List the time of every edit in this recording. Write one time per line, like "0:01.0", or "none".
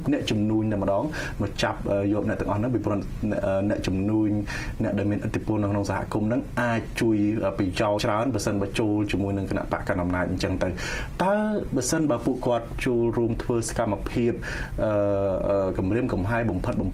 0:08.0